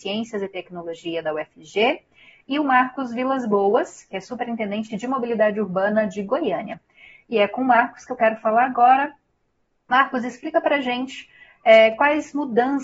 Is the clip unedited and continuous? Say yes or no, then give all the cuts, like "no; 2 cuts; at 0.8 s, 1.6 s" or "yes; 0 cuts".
yes; 0 cuts